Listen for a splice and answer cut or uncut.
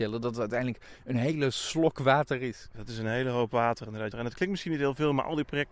cut